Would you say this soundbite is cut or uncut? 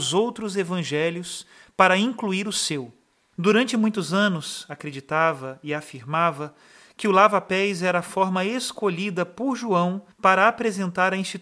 cut